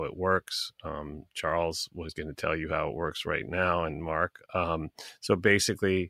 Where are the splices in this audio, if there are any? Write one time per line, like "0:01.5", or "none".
none